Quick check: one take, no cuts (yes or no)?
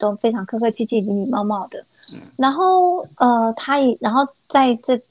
yes